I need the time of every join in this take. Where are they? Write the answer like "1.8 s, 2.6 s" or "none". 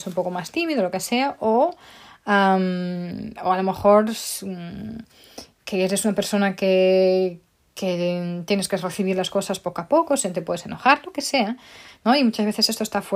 none